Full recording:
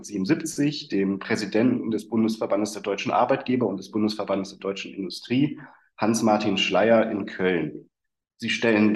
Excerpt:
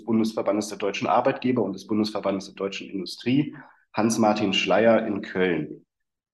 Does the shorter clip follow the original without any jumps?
yes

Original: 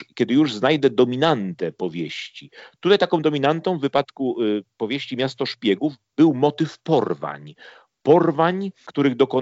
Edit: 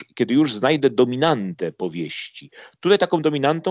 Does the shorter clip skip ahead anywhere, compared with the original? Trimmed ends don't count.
no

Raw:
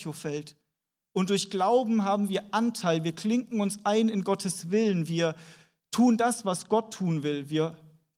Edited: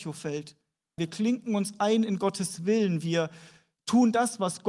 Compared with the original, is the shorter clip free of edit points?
no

